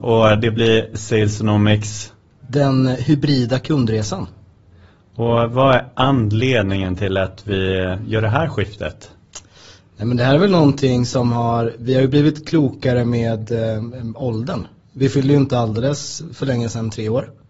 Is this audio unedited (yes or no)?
yes